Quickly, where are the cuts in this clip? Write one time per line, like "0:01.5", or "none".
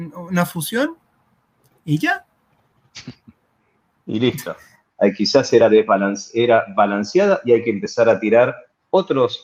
0:04.9